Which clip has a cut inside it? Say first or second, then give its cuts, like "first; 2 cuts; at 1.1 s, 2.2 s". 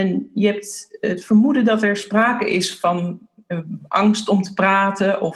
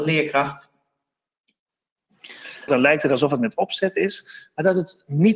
second; 1 cut; at 2.7 s